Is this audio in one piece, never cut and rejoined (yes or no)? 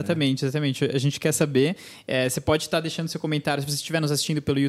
yes